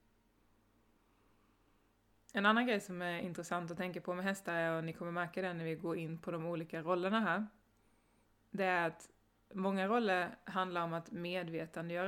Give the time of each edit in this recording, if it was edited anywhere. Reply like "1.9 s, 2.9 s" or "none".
none